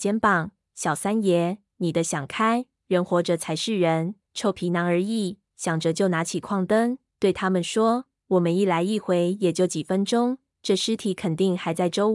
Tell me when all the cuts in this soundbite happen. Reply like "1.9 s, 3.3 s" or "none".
4.3 s, 5.5 s